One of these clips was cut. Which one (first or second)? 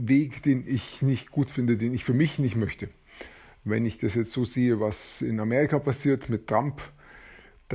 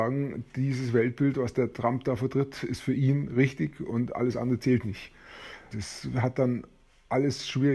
second